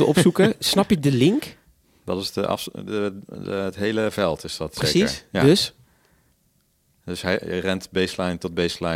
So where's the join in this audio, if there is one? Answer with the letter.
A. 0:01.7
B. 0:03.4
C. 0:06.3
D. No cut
D